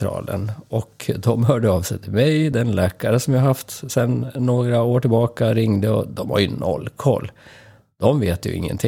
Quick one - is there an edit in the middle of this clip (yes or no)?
no